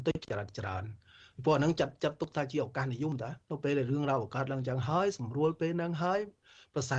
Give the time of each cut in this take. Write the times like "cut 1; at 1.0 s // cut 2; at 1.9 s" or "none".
none